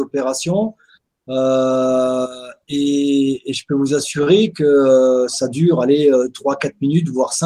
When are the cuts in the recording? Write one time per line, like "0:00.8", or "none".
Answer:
none